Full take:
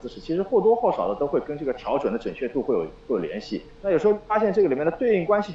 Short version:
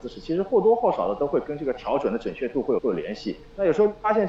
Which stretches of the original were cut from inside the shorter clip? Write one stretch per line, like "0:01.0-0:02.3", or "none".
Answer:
0:02.8-0:03.0